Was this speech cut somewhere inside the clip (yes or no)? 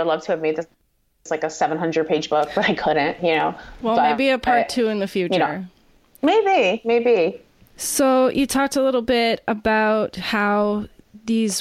yes